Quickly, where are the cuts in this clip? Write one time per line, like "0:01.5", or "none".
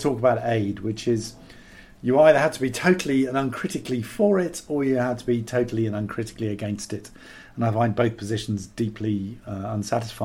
none